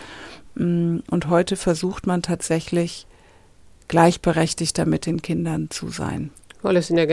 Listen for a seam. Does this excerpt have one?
no; 0 cuts

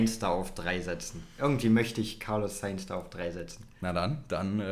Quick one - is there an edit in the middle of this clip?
no; 0 cuts

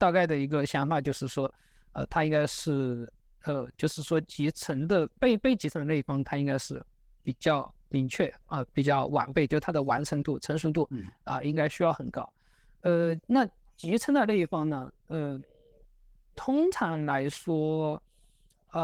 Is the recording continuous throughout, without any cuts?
yes; 0 cuts

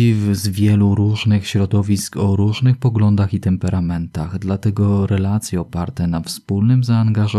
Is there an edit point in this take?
no; 0 cuts

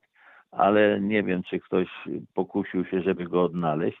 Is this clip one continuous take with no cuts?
yes; 0 cuts

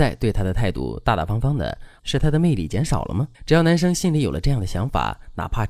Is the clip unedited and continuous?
no; 2 cuts; at 2.0 s, 3.3 s

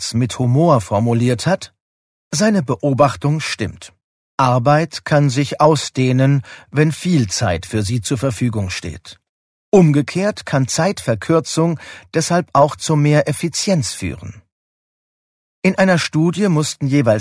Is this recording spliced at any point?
no; 0 cuts

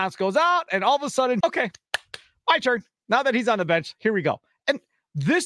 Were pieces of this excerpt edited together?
yes; 1 cut; at 1.4 s

